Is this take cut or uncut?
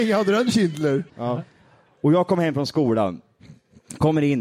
cut